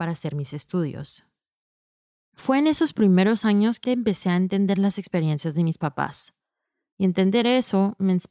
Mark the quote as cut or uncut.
cut